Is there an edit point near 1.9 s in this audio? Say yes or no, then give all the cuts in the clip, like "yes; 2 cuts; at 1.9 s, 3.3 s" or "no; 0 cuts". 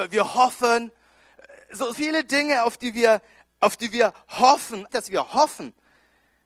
yes; 2 cuts; at 1.9 s, 4.9 s